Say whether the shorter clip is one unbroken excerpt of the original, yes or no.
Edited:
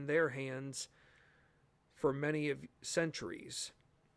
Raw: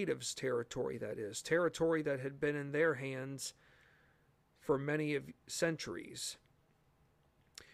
yes